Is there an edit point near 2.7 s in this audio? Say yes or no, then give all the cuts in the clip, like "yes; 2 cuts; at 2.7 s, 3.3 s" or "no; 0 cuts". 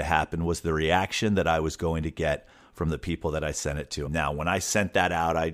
no; 1 cut; at 4.0 s